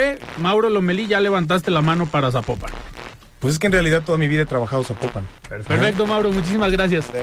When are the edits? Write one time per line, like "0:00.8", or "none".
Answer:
0:05.7